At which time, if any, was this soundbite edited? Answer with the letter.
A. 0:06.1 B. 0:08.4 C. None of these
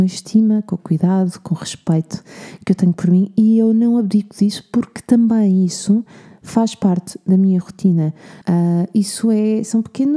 B